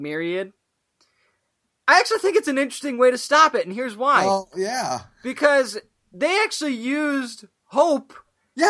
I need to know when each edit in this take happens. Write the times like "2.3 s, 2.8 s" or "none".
none